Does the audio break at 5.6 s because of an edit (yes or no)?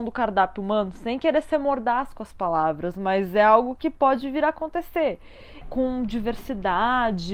yes